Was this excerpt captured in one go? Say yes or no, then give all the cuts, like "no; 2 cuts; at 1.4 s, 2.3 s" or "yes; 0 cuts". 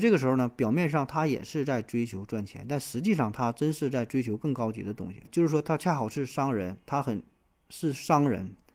no; 1 cut; at 5.2 s